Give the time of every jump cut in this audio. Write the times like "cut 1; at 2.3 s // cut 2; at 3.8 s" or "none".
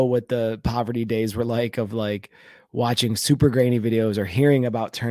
none